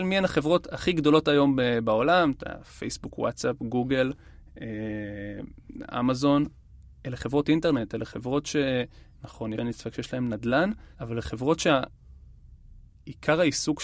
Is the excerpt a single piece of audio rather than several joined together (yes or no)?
no